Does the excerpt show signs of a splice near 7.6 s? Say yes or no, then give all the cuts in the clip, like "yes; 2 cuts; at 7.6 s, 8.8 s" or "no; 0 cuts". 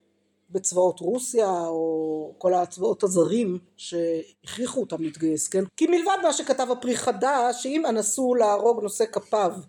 no; 1 cut; at 5.7 s